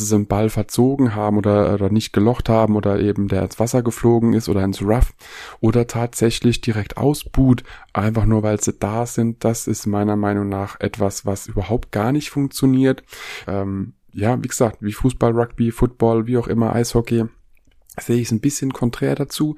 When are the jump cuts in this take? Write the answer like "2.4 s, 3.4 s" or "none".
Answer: 13.4 s

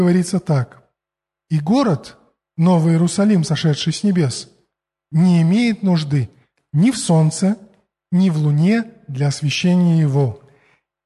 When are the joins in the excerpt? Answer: none

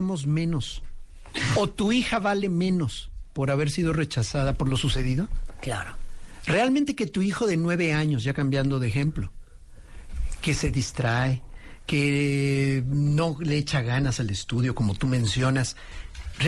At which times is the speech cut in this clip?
none

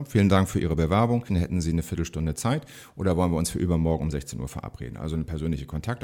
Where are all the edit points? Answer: 1.3 s

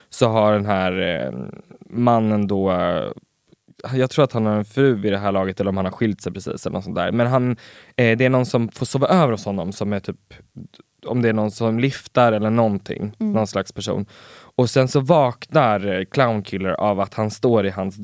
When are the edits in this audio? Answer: none

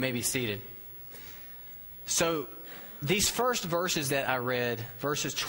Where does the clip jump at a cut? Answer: none

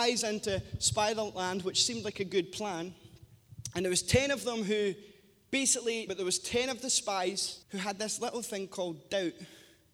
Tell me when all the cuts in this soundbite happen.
6.1 s, 7.6 s

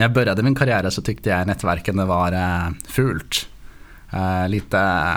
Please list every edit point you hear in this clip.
none

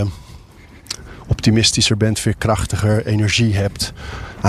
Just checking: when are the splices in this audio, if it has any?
none

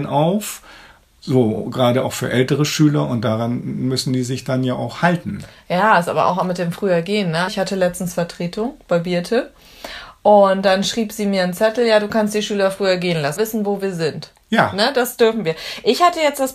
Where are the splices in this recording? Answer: 7.5 s, 13.4 s

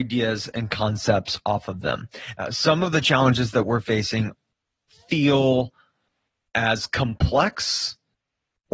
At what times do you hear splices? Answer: 2.4 s

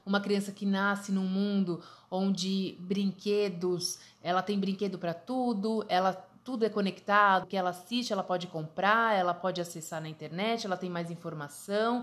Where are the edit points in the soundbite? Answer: 7.4 s

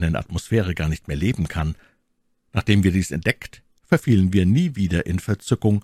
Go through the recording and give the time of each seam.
none

